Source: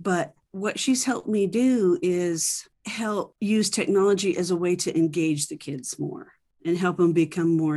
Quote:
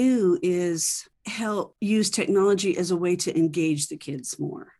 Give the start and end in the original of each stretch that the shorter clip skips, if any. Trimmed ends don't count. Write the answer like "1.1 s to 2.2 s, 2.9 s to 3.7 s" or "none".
none